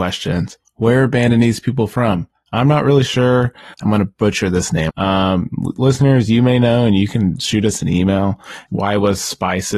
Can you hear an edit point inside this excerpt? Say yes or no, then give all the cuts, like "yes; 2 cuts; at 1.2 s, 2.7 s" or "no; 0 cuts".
yes; 3 cuts; at 3.7 s, 4.9 s, 8.7 s